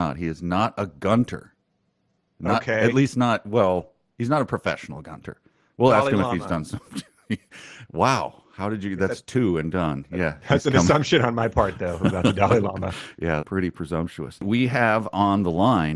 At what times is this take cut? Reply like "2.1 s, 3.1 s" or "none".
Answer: 13.4 s